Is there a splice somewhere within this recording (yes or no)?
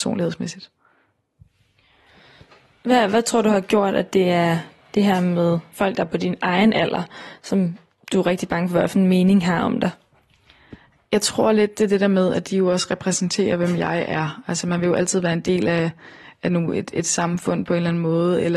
no